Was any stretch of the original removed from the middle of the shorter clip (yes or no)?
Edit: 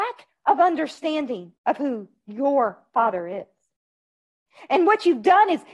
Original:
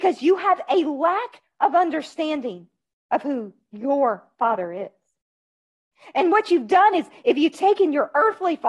yes